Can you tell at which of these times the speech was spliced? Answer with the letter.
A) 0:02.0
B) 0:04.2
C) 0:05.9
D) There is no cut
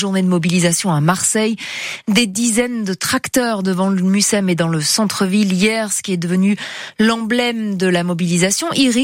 D